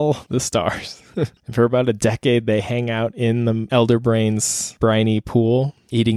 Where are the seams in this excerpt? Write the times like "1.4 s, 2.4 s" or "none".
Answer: 1.4 s